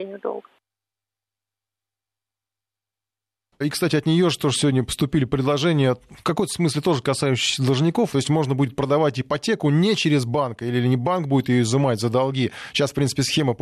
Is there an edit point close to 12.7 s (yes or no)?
no